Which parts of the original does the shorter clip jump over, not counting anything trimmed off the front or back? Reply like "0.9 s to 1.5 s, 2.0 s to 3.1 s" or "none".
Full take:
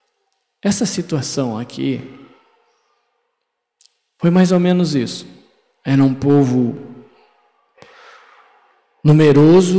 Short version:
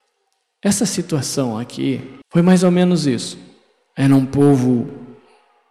2.2 s to 4.1 s